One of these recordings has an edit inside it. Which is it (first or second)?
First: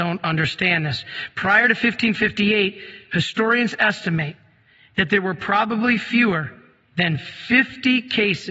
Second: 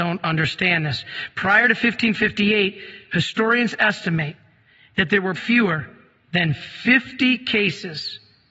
second